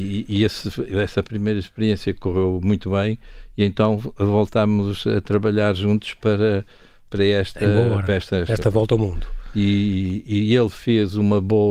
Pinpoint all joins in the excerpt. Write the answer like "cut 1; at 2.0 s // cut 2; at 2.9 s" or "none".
none